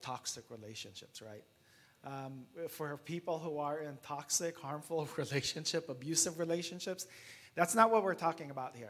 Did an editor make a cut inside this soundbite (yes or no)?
no